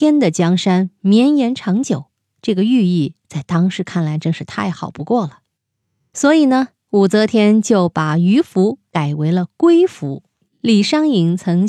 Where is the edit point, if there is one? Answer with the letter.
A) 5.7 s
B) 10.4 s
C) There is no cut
C